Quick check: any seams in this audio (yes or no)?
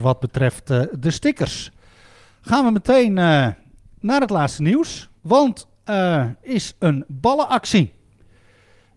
yes